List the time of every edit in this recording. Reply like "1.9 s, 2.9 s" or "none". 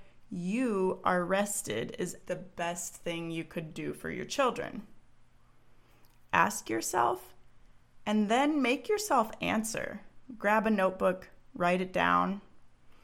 2.2 s